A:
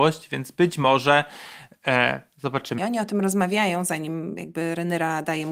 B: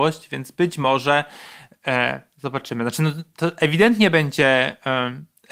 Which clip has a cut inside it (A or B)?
A